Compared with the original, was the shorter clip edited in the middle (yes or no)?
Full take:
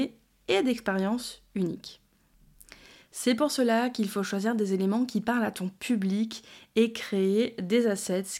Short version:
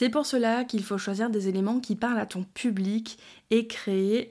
no